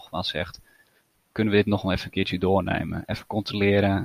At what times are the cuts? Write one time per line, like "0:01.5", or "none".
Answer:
none